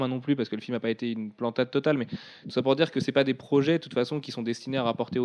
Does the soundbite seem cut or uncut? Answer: uncut